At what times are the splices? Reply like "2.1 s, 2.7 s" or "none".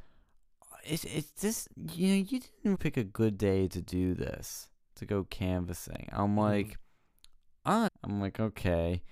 2.7 s, 7.9 s